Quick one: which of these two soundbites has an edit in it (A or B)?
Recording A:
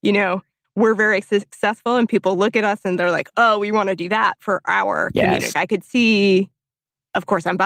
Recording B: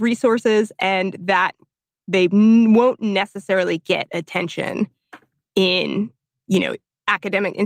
A